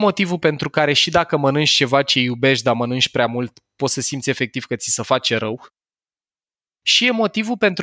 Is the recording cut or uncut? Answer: uncut